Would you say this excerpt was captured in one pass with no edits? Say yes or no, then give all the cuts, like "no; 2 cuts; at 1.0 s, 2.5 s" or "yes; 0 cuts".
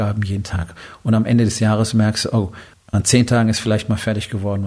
no; 1 cut; at 2.7 s